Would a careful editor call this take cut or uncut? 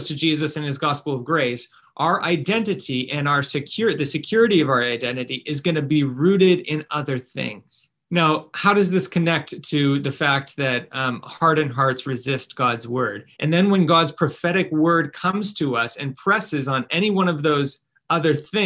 cut